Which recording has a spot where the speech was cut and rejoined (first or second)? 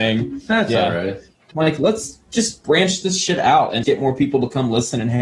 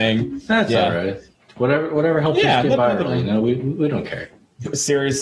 first